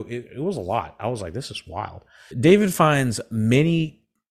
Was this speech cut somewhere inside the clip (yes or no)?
yes